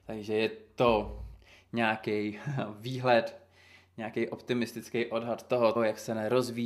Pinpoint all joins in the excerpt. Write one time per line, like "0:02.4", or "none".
0:05.8